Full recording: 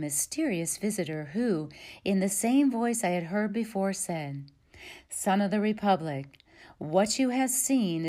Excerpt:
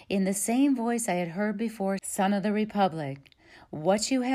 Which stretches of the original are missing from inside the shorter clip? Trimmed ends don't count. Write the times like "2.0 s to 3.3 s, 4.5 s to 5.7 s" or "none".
3.9 s to 5.1 s